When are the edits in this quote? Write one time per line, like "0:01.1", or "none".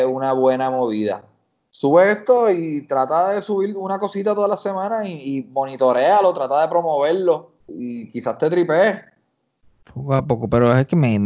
0:07.6